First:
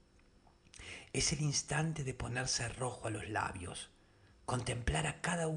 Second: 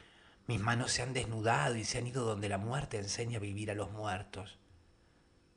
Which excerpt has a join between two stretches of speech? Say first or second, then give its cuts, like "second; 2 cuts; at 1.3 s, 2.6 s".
first; 1 cut; at 4.3 s